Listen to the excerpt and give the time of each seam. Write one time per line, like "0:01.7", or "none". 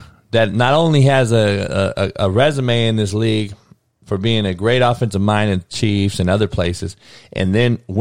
none